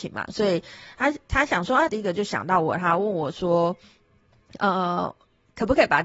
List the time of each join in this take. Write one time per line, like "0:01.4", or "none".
0:01.9